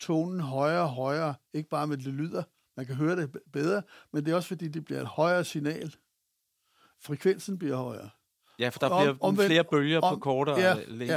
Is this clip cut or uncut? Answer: uncut